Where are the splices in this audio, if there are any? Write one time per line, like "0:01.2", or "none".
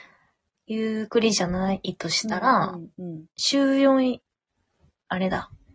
0:01.1